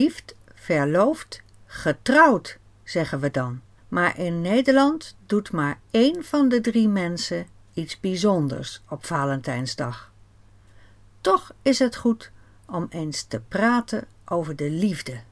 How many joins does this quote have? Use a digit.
1